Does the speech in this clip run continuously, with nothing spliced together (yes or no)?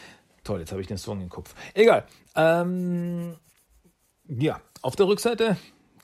yes